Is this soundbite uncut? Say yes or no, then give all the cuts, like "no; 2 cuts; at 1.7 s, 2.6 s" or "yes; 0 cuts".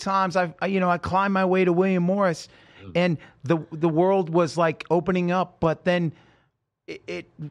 yes; 0 cuts